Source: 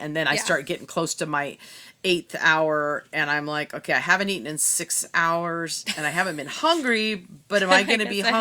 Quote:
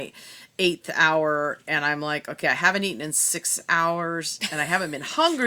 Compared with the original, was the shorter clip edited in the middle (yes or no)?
no